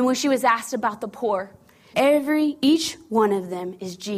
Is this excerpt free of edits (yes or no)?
no